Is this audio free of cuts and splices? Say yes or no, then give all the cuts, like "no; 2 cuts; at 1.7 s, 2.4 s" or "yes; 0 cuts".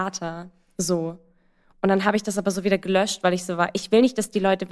yes; 0 cuts